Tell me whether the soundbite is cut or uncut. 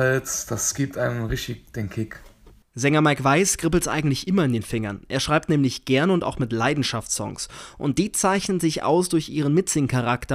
uncut